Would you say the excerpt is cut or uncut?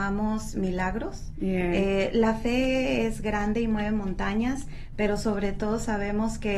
uncut